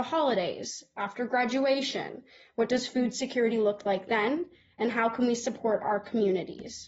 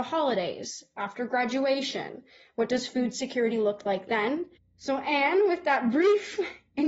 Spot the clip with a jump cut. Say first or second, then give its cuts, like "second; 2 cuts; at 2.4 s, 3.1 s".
second; 1 cut; at 4.6 s